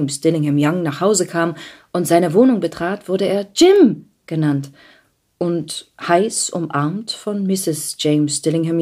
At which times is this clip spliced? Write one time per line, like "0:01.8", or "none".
none